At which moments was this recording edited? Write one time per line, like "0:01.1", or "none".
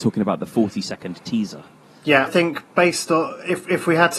0:02.3